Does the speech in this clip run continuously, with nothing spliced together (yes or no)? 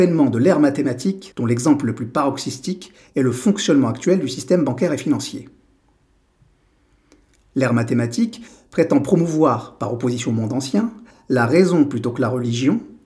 no